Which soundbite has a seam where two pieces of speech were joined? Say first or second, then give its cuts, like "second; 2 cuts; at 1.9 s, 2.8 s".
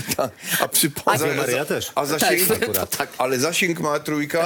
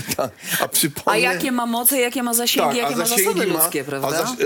first; 1 cut; at 1.1 s